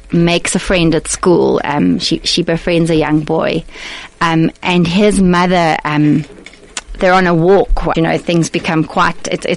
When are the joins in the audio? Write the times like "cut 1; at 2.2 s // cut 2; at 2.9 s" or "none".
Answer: cut 1; at 7.9 s